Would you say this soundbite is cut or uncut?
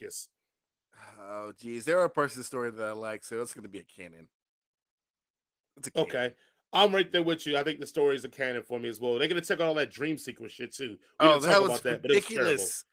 uncut